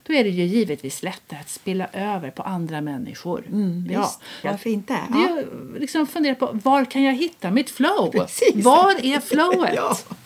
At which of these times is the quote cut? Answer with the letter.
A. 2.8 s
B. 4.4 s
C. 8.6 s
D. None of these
B